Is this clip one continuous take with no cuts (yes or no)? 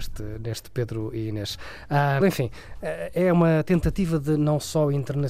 no